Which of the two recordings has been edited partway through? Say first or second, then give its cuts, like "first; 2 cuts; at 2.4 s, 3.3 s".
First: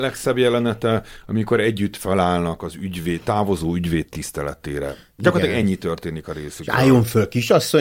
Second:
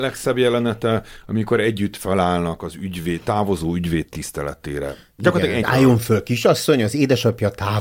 second; 1 cut; at 5.6 s